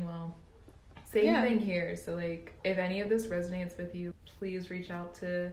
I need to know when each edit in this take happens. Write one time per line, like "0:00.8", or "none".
0:02.6
0:04.1